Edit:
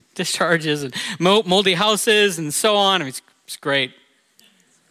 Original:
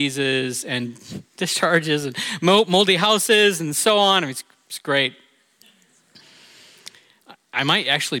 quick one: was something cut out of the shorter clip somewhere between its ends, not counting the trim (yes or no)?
no